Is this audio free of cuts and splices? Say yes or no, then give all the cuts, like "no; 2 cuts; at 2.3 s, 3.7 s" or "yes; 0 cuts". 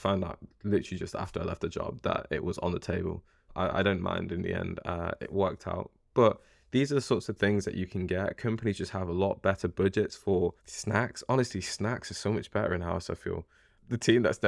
no; 1 cut; at 10.6 s